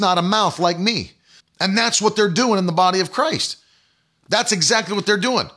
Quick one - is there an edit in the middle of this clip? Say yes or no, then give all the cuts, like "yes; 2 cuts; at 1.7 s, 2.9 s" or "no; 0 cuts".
yes; 1 cut; at 1.4 s